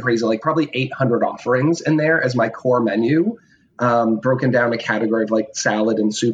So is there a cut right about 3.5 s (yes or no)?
no